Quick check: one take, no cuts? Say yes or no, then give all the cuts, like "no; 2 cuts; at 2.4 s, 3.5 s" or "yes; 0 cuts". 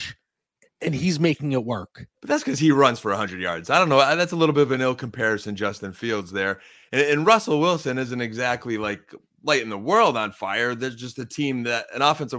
yes; 0 cuts